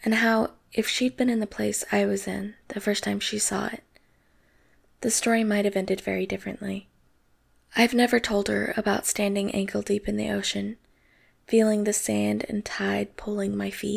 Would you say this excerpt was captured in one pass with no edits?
yes; 0 cuts

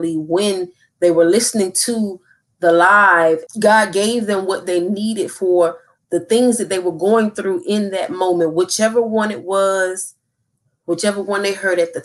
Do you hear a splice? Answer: yes; 1 cut; at 3.5 s

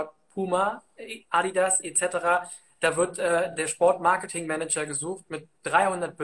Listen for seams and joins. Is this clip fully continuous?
yes; 0 cuts

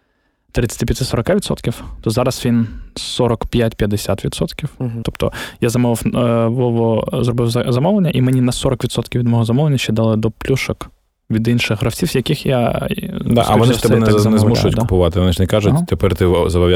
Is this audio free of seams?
no; 1 cut; at 5.0 s

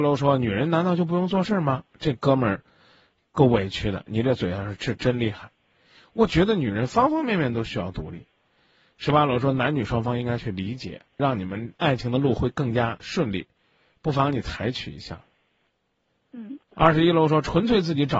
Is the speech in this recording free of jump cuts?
no; 3 cuts; at 4.1 s, 5.9 s, 11.2 s

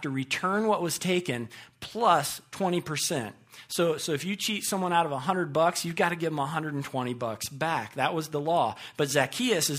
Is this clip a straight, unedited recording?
yes; 0 cuts

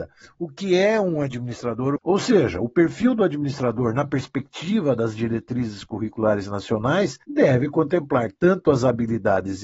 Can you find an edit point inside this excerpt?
yes; 2 cuts; at 2.0 s, 7.2 s

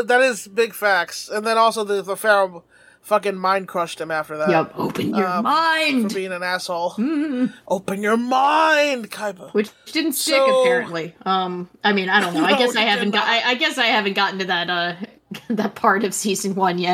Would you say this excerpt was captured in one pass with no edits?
yes; 0 cuts

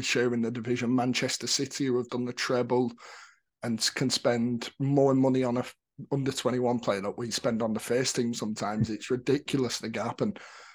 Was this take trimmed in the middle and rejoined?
yes; 1 cut; at 2.1 s

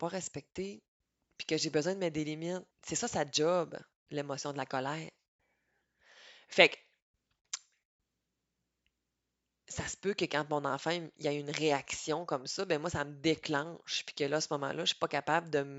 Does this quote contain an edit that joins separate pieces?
yes; 1 cut; at 2.7 s

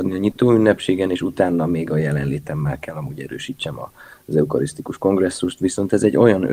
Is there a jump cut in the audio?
no; 0 cuts

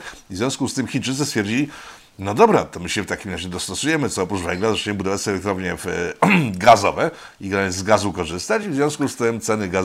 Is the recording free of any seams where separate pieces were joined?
yes; 0 cuts

